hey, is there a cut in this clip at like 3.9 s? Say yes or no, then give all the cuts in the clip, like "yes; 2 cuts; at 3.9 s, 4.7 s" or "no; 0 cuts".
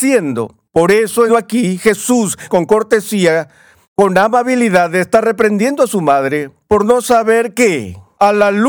no; 2 cuts; at 1.3 s, 2.5 s